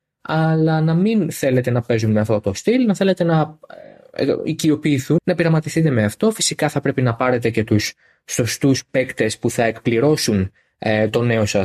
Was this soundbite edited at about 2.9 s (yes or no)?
no